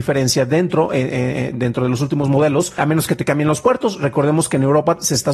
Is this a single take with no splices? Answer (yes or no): no